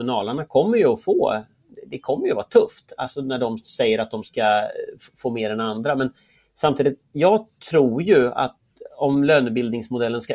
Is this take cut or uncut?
uncut